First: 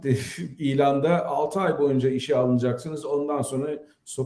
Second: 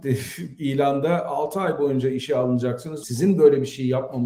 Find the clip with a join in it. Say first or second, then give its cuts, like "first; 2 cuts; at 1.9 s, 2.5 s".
second; 1 cut; at 3.0 s